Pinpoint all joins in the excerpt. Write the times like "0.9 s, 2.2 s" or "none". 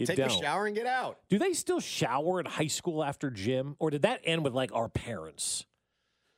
none